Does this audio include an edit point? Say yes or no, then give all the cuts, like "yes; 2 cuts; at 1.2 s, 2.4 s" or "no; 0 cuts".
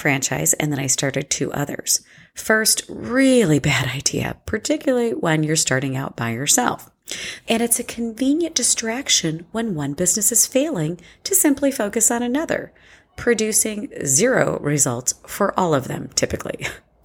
yes; 1 cut; at 7.4 s